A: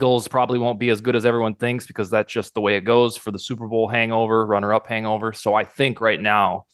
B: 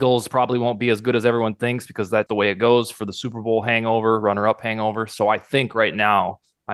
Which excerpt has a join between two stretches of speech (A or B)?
B